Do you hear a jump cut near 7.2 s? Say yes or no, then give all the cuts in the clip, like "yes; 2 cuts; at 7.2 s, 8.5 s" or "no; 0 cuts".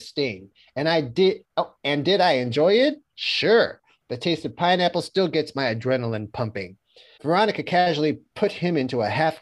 yes; 1 cut; at 7.2 s